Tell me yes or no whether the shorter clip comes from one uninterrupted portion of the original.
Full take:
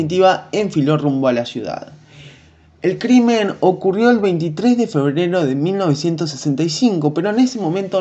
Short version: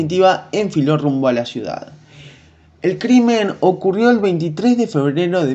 yes